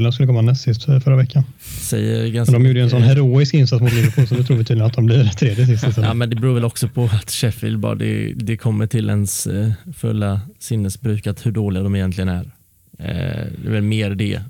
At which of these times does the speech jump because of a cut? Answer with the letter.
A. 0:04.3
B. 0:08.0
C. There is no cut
C